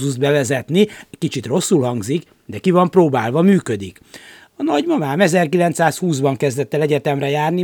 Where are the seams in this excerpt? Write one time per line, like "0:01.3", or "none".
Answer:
none